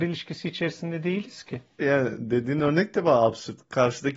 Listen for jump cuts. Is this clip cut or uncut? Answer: cut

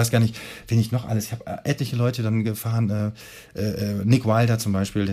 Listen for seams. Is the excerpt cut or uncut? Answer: uncut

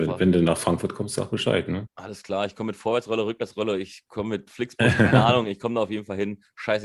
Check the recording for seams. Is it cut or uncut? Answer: cut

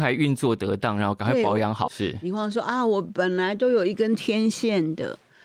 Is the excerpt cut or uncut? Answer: cut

